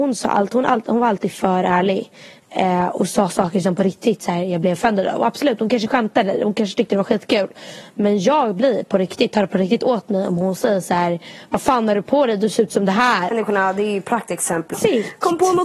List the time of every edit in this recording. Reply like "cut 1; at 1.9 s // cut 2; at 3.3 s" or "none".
cut 1; at 13.3 s // cut 2; at 14.7 s